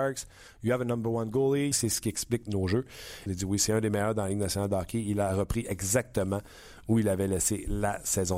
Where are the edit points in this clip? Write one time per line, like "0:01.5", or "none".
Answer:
0:01.7
0:03.3